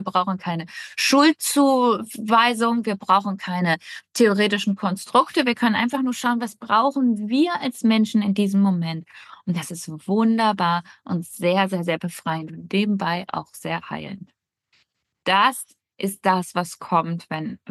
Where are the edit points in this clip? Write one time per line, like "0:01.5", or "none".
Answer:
none

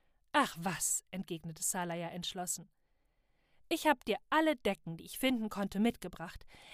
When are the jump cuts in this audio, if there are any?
none

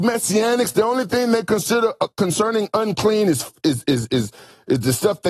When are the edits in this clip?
none

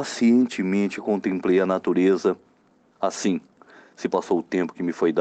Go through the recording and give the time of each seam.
none

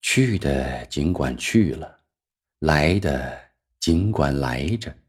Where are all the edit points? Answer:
none

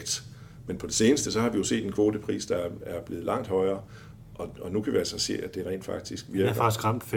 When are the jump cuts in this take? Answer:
none

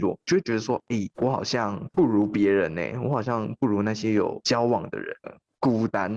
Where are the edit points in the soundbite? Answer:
0:05.2

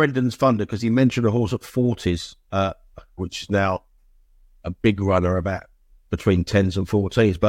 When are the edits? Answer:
0:03.2

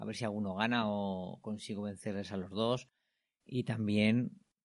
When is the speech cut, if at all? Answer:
0:03.4

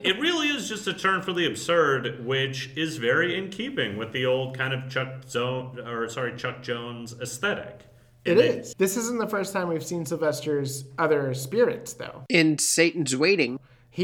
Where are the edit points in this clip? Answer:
0:08.7

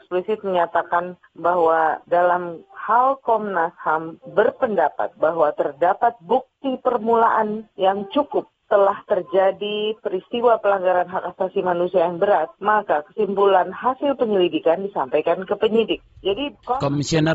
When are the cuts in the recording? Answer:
0:01.2

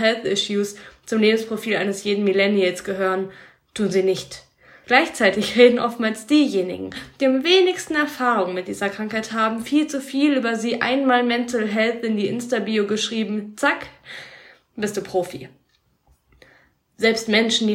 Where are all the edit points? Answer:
0:04.8

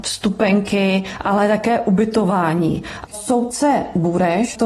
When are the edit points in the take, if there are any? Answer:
0:03.1

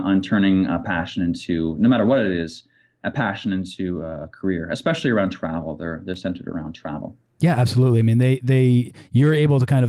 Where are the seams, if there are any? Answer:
none

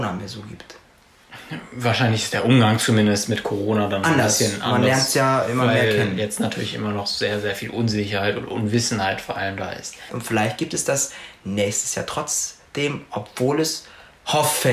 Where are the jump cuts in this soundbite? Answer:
0:10.1

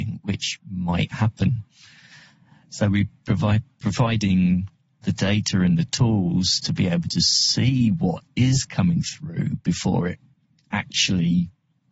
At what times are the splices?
none

